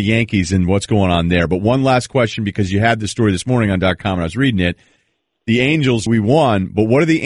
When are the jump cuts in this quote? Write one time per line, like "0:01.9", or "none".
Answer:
0:06.1